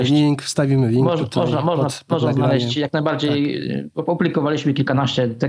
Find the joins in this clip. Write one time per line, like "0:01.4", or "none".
none